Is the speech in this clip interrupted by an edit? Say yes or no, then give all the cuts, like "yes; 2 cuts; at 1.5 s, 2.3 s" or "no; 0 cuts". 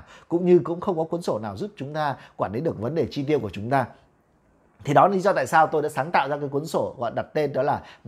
no; 0 cuts